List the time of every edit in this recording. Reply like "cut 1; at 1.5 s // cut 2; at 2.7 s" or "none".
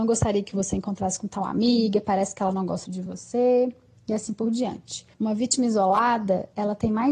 cut 1; at 2.8 s // cut 2; at 5.1 s